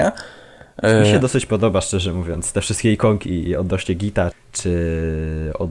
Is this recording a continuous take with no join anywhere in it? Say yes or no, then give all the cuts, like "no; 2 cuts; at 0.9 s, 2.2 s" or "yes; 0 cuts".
no; 1 cut; at 4.3 s